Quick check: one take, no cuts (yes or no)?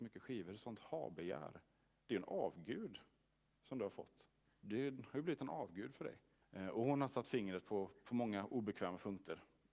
no